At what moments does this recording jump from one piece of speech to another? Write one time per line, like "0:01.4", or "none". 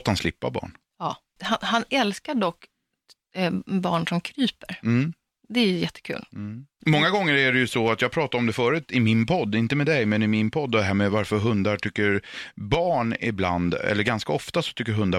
none